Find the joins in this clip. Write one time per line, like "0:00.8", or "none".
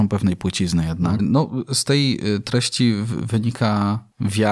0:01.2